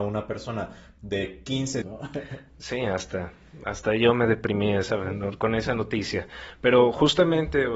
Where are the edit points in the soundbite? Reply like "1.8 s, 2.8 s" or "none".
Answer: 1.8 s